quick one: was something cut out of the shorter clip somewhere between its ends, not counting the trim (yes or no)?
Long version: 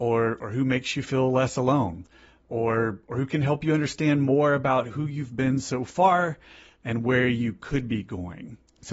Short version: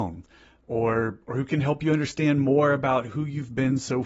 no